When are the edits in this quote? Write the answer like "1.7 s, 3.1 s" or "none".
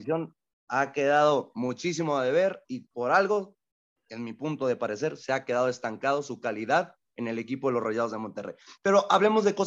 none